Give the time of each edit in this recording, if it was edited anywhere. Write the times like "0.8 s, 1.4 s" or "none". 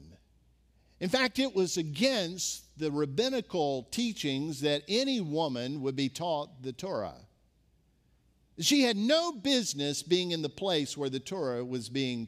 none